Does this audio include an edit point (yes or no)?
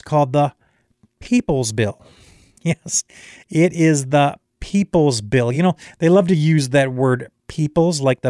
no